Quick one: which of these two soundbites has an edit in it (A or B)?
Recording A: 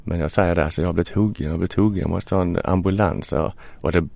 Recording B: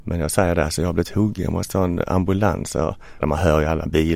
B